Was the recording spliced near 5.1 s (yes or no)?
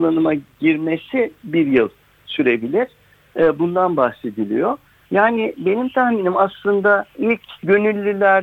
yes